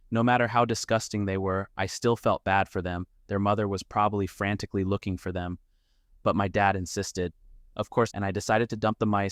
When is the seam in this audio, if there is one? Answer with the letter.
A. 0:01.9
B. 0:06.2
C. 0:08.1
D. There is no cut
C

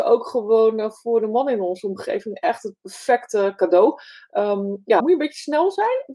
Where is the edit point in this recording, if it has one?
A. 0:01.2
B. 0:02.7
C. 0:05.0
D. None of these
C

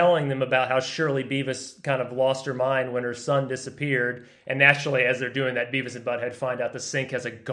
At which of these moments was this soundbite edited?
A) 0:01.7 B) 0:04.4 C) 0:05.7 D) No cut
D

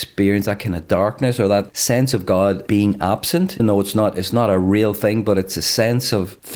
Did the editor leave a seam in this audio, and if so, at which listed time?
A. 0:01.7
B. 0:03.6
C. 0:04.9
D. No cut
B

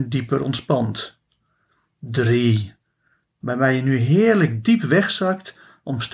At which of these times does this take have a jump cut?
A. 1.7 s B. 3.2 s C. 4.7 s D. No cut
D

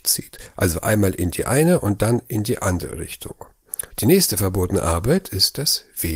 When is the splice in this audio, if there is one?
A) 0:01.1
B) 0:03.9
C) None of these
B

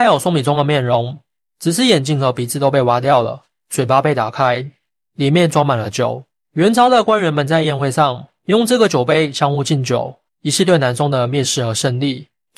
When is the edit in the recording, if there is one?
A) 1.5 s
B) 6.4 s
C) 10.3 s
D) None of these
C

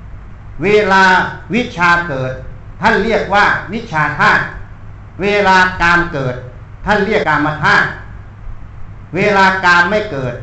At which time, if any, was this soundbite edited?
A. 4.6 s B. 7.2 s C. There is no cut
B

